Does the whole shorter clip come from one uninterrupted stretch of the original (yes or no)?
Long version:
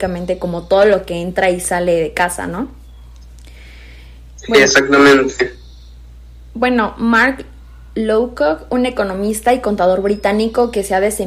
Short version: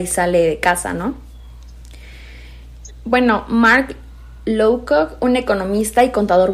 no